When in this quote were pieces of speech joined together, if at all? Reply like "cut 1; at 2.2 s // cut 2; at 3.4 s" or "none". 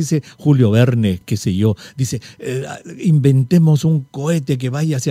none

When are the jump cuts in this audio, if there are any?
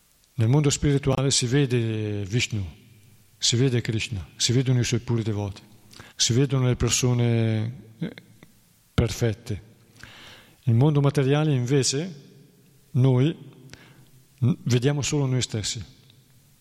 cut 1; at 6.1 s

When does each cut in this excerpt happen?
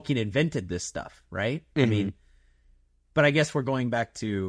none

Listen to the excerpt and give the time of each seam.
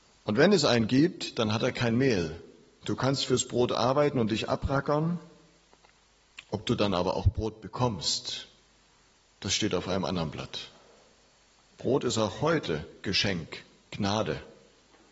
cut 1; at 2.8 s

